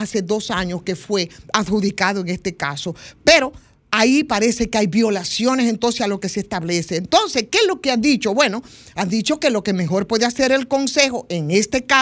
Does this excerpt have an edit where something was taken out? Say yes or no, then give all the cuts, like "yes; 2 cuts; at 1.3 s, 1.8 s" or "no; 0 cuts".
no; 0 cuts